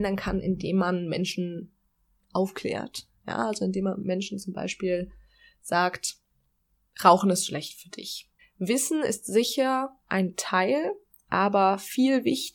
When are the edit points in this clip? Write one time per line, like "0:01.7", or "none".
0:08.4
0:10.0